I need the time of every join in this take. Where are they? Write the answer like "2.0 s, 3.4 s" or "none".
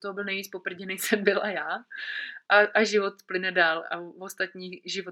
2.5 s